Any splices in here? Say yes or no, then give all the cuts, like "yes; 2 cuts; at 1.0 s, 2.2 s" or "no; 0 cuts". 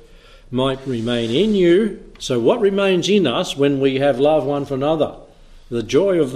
no; 0 cuts